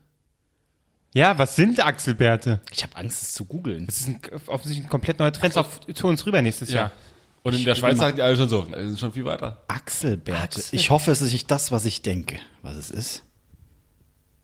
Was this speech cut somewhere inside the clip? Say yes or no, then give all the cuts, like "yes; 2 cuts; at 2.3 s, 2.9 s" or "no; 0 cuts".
yes; 2 cuts; at 5.5 s, 8.7 s